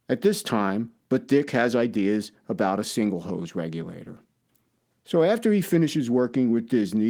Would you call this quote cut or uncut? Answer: cut